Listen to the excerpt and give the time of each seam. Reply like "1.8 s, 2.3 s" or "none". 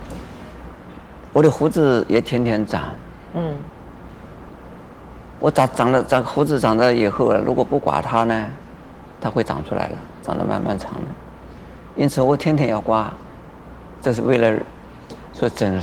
none

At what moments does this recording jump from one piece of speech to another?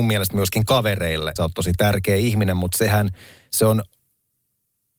1.4 s

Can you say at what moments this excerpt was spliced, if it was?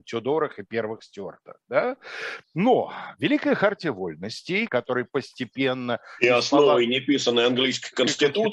2.4 s, 4.7 s

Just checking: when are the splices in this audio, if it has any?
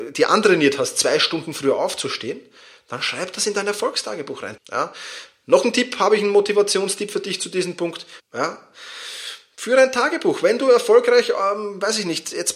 4.6 s, 8.2 s

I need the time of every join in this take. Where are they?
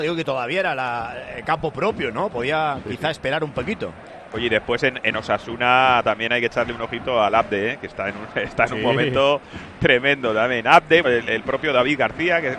11.0 s

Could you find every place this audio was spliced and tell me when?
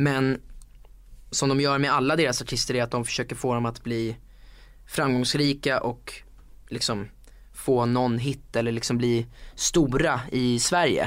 1.3 s

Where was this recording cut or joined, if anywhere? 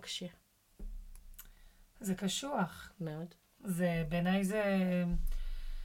none

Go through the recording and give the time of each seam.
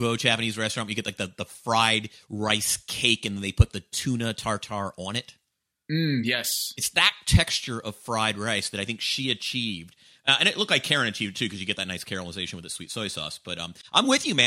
none

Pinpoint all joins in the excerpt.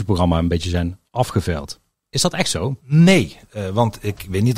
2.8 s

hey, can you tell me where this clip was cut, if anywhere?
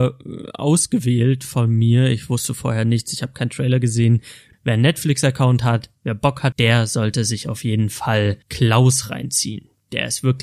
4.5 s, 6.5 s, 8.4 s

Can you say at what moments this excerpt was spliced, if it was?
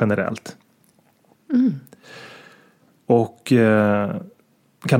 1.3 s

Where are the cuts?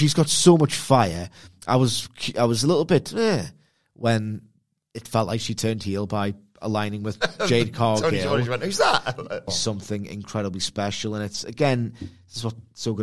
9.5 s

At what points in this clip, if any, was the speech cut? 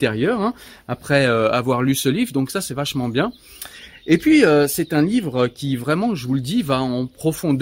none

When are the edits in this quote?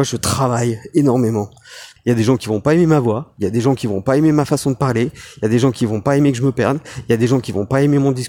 2.0 s

